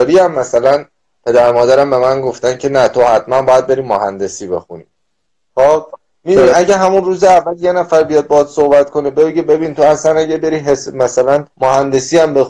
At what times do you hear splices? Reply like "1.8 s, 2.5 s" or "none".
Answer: 11.5 s